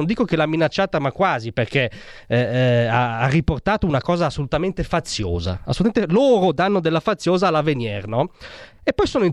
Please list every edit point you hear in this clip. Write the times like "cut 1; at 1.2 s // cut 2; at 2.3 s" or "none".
none